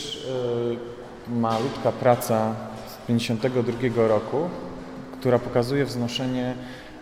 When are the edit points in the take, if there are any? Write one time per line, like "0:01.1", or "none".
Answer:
none